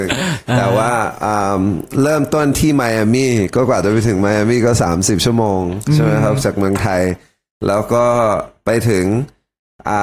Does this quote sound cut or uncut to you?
uncut